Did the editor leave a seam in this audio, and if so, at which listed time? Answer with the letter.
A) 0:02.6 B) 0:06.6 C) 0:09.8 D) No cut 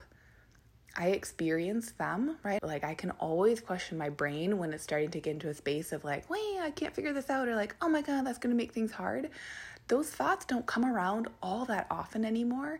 A